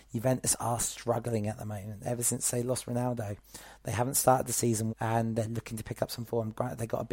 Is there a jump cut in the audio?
yes; 1 cut; at 4.9 s

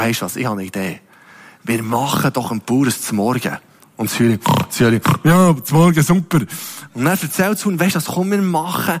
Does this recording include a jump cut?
no; 0 cuts

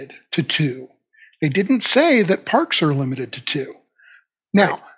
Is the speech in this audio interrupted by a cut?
no; 0 cuts

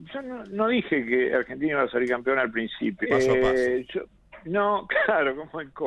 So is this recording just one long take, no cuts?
no; 1 cut; at 3.0 s

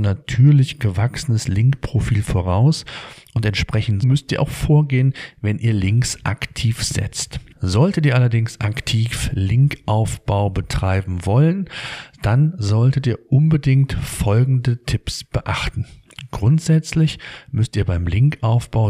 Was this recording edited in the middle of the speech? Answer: yes; 2 cuts; at 4.0 s, 7.5 s

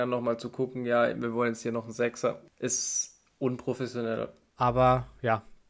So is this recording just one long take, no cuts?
no; 2 cuts; at 2.5 s, 4.5 s

